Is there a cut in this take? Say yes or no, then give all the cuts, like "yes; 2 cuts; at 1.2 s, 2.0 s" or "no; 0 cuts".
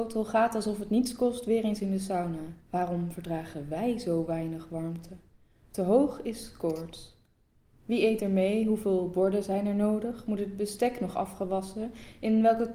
yes; 1 cut; at 2.6 s